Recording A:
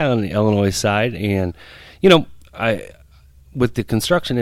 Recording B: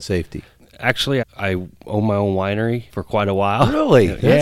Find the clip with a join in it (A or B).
B